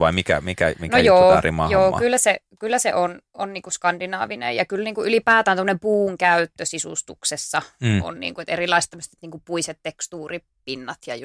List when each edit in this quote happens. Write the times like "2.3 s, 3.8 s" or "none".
none